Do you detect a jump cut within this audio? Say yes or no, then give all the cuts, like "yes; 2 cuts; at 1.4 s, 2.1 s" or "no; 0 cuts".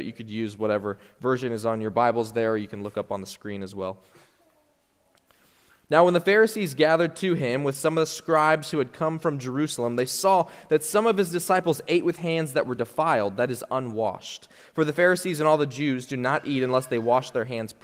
no; 0 cuts